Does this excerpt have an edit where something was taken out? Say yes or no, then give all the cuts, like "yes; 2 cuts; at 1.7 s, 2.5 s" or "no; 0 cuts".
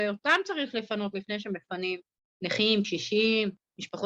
no; 0 cuts